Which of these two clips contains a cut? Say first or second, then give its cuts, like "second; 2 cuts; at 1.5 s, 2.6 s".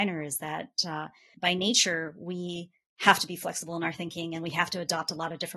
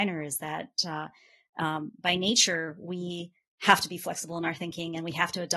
first; 1 cut; at 1.3 s